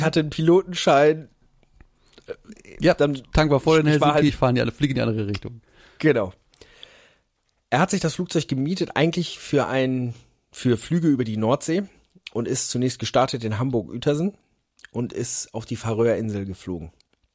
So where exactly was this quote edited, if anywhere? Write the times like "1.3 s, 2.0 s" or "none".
4.3 s